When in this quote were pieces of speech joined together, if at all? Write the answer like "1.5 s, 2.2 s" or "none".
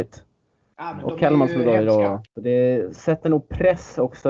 2.3 s